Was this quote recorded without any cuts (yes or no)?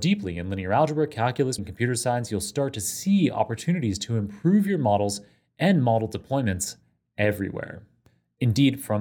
no